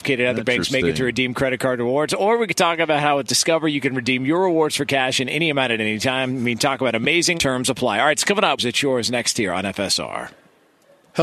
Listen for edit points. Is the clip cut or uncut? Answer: cut